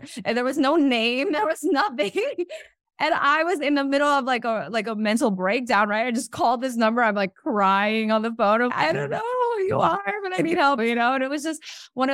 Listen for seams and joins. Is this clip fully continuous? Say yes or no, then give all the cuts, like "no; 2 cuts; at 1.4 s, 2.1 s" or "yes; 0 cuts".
no; 2 cuts; at 8.7 s, 10.8 s